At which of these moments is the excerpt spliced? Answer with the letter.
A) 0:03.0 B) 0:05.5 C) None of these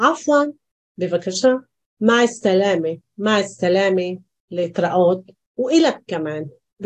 A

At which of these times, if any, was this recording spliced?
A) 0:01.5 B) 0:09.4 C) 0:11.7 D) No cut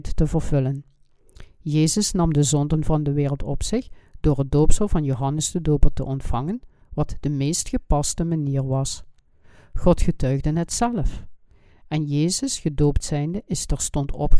D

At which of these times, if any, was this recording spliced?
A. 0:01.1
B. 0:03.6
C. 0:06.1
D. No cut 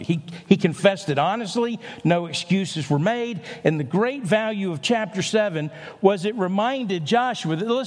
D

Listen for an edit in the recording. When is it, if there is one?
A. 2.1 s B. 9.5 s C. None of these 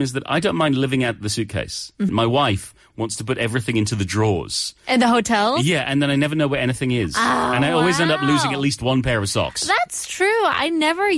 A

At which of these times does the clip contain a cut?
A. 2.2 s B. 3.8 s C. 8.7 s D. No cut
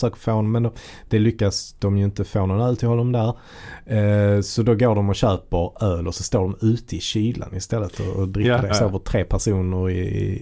C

